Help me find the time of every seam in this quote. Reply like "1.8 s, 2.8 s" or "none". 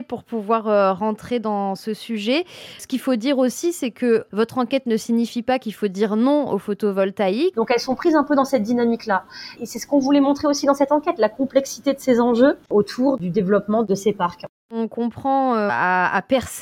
7.5 s, 15.7 s